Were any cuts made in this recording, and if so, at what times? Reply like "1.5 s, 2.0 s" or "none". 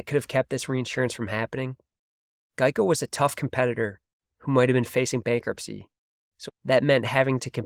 6.5 s